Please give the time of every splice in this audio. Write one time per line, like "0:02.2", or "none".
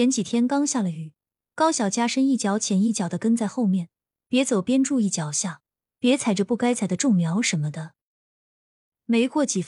none